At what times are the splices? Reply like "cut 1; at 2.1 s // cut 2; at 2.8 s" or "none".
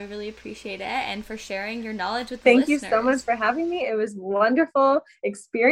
none

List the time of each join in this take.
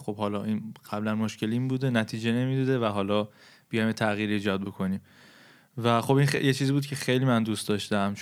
none

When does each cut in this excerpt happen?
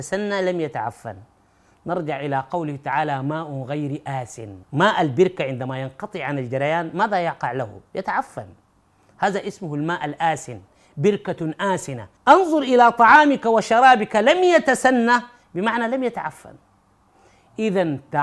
cut 1; at 4.6 s // cut 2; at 12.2 s

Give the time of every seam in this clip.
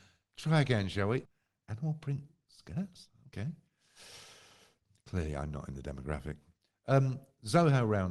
cut 1; at 1.2 s

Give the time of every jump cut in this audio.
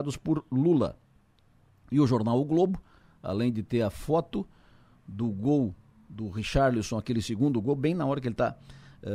none

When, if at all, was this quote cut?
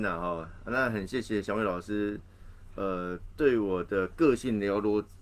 none

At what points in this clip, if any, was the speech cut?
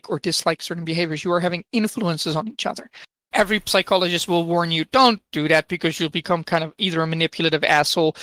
cut 1; at 3.3 s

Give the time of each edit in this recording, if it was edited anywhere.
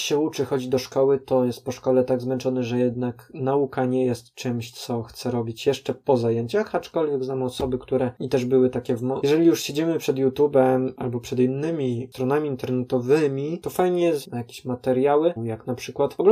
cut 1; at 9.2 s // cut 2; at 14.2 s // cut 3; at 15.4 s

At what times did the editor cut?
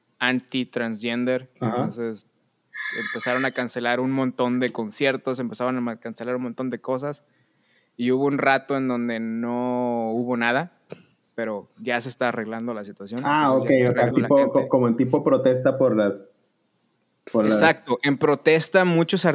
cut 1; at 14.1 s

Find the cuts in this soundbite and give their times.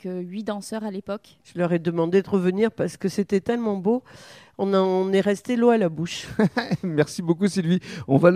cut 1; at 1.4 s

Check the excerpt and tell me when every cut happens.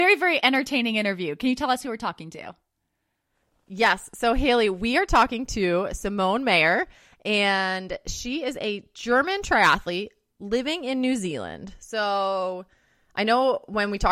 none

